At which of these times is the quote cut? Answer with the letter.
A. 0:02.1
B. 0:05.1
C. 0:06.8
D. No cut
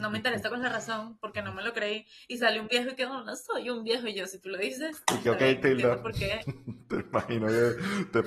D